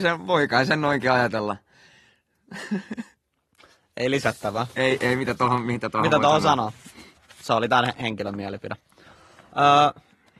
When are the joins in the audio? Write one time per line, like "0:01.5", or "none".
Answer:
none